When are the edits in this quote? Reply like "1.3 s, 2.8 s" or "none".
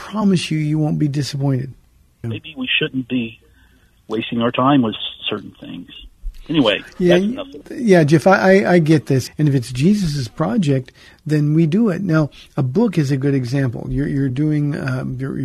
2.2 s, 7.6 s, 9.3 s